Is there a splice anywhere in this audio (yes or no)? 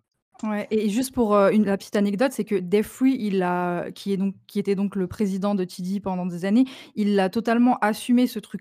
no